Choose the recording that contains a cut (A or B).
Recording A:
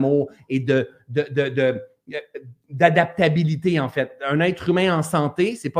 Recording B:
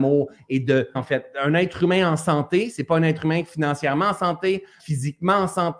B